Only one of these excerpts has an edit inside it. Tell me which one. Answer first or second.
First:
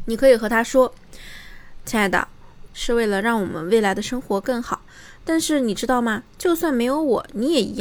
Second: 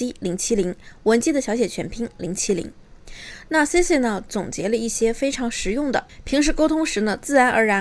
first